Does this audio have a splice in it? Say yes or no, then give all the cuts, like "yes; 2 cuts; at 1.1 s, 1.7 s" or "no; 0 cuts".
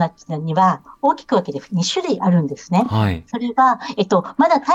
no; 0 cuts